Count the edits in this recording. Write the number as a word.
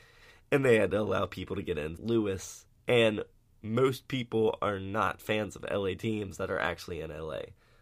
one